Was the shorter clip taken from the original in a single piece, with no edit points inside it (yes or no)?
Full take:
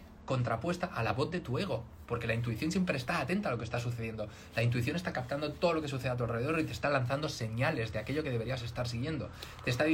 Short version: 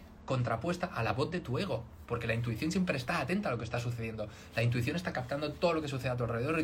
yes